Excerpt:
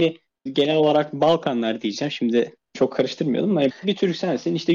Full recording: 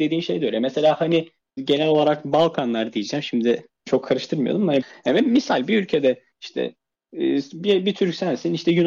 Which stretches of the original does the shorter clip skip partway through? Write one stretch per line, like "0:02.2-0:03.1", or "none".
0:04.9-0:07.8